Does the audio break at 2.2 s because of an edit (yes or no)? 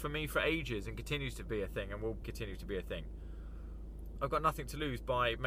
yes